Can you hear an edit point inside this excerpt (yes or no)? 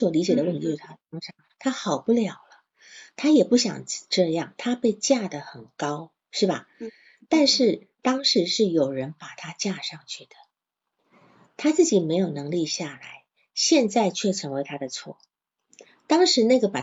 no